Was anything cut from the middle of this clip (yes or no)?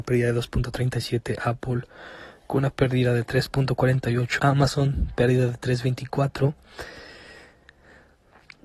yes